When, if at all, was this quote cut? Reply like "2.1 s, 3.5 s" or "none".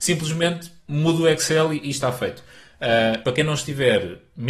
3.2 s